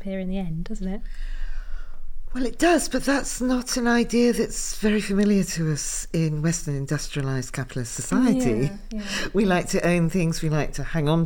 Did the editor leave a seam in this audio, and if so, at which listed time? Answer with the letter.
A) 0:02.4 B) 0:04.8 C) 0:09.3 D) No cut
D